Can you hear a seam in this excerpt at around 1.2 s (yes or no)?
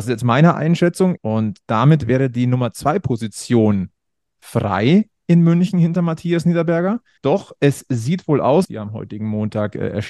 yes